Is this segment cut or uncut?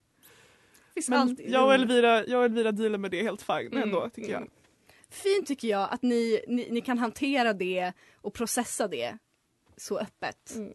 uncut